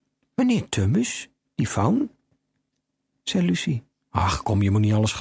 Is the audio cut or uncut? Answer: uncut